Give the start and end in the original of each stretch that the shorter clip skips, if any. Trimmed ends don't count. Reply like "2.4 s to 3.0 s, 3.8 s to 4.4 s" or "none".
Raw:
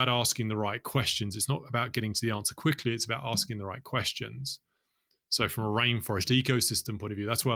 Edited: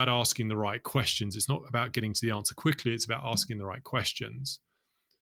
none